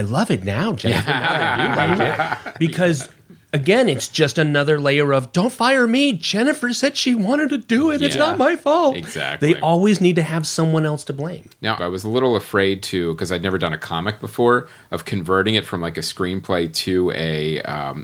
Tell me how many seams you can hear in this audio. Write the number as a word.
one